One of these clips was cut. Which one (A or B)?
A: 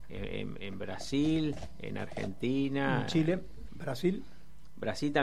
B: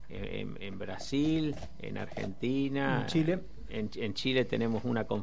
A